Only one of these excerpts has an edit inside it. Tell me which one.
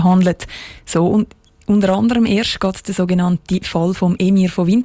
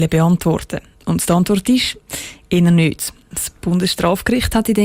second; 1 cut; at 3.3 s

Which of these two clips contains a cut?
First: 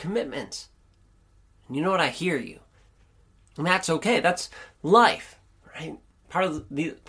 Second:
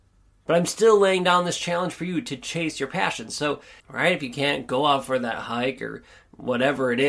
second; 1 cut; at 3.8 s

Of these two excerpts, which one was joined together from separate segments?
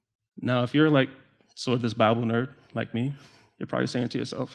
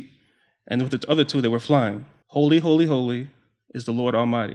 second; 1 cut; at 2.2 s

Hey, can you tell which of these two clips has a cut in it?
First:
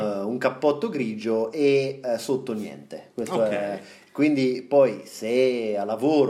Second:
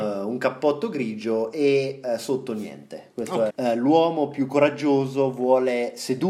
second; 1 cut; at 3.5 s

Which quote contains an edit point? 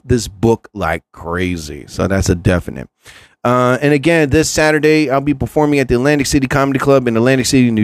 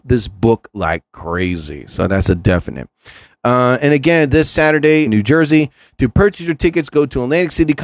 second; 1 cut; at 5.1 s

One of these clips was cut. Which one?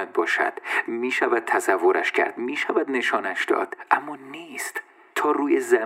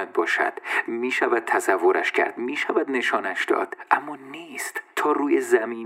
second; 1 cut; at 4.9 s

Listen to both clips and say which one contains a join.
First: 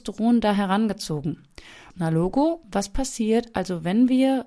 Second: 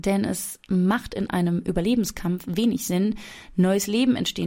first; 1 cut; at 1.9 s

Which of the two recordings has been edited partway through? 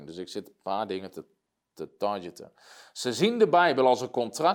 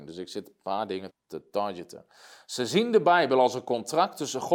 second; 1 cut; at 1.1 s

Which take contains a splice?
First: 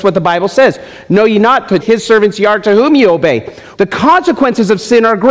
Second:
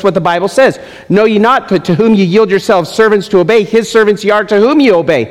first; 2 cuts; at 1.8 s, 3.7 s

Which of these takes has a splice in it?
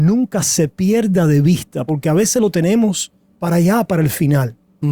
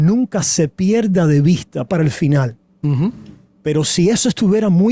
second; 1 cut; at 1.9 s

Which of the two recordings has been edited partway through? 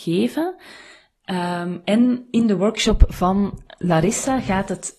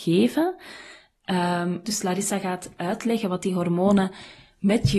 second; 1 cut; at 1.8 s

